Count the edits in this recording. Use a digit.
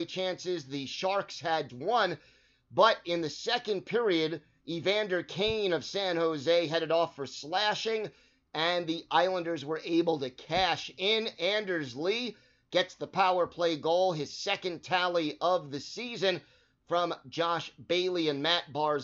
1